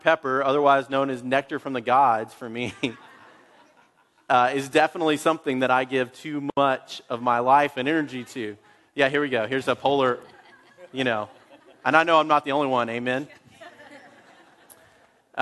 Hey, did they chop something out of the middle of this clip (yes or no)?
no